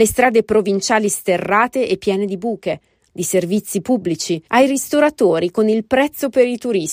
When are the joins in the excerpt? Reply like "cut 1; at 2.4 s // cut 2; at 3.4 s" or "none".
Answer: cut 1; at 3.1 s // cut 2; at 4.5 s